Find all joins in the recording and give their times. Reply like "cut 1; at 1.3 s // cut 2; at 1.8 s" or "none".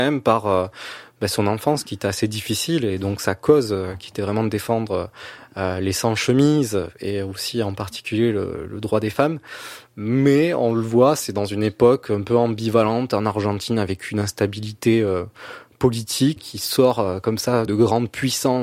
cut 1; at 16.4 s // cut 2; at 17.7 s